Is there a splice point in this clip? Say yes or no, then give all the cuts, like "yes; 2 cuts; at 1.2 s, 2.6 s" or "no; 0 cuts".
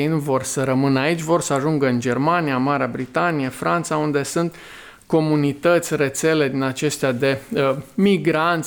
no; 0 cuts